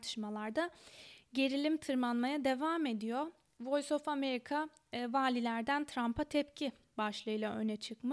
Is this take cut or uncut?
uncut